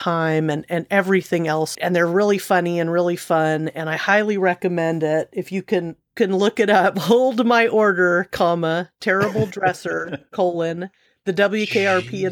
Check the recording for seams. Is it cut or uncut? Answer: cut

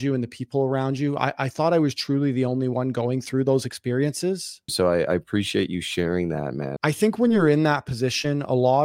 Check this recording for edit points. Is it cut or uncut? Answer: cut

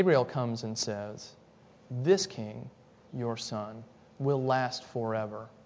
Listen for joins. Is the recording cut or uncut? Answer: uncut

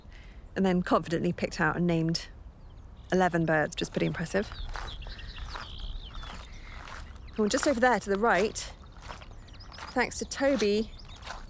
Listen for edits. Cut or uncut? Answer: uncut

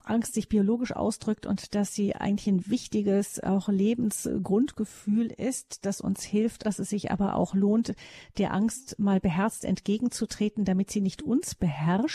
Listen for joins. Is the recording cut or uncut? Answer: cut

